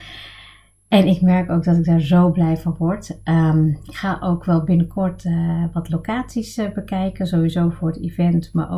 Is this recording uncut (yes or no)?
yes